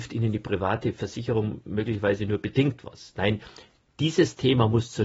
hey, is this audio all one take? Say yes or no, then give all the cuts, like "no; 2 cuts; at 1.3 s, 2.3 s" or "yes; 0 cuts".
yes; 0 cuts